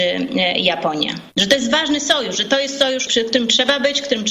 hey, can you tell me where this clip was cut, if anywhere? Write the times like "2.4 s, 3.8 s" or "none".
1.3 s, 3.1 s